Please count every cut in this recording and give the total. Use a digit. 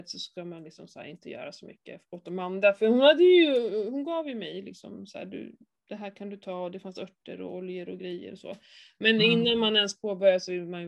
0